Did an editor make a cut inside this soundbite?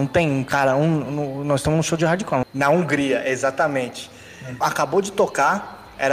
yes; 2 cuts; at 2.4 s, 4.6 s

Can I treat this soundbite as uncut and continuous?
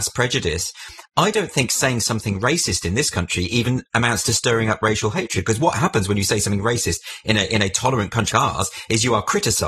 no; 1 cut; at 8.3 s

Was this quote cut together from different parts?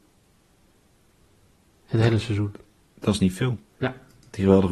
yes; 1 cut; at 3.7 s

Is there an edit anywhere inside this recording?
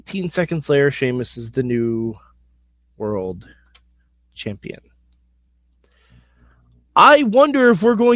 no; 0 cuts

